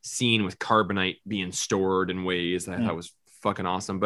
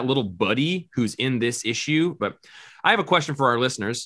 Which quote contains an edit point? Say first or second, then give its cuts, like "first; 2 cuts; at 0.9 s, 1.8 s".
second; 1 cut; at 2.2 s